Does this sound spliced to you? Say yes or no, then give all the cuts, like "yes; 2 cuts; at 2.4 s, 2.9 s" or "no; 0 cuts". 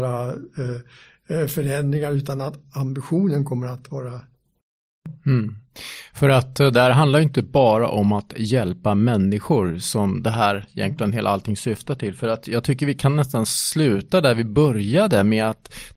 no; 0 cuts